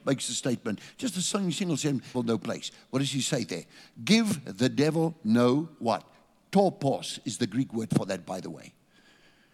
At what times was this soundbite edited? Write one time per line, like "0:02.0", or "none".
0:02.1